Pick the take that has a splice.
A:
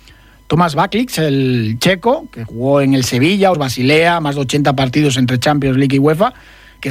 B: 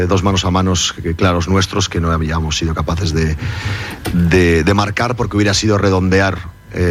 A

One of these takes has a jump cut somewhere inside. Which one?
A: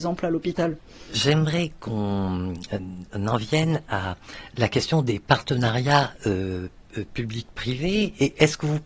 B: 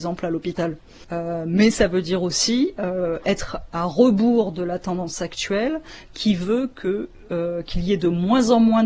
B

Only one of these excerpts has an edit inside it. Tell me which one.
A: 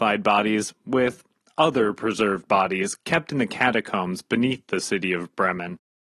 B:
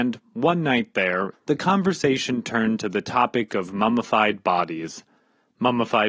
B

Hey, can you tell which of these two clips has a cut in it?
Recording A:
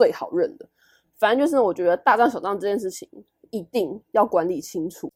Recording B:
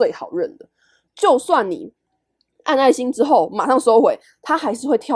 B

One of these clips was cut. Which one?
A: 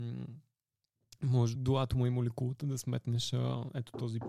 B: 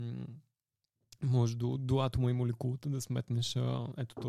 A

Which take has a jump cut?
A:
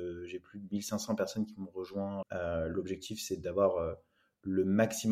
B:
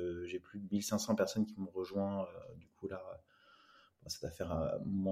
A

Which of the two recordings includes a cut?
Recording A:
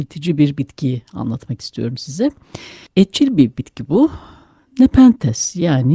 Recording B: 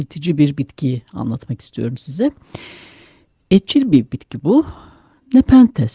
A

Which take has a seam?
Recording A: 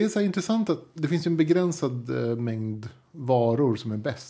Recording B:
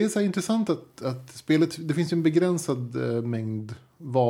A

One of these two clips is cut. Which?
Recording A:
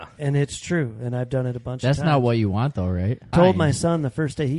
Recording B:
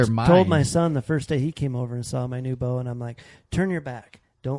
A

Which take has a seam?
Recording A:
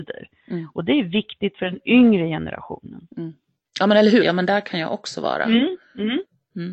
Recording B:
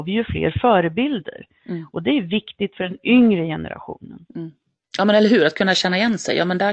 A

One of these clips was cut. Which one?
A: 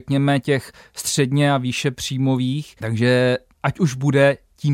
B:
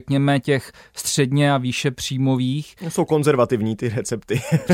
A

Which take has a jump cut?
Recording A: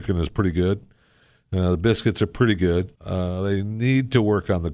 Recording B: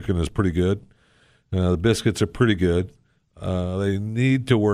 A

